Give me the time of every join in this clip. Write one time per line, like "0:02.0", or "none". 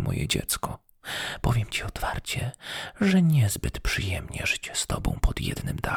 none